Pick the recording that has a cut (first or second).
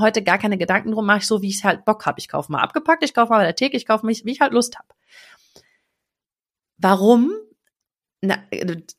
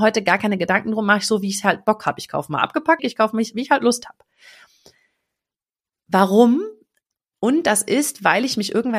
second